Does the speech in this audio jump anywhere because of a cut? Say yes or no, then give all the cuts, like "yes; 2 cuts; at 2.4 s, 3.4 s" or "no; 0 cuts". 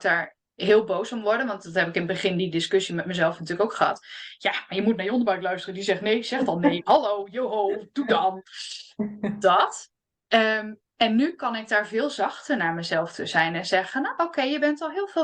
no; 0 cuts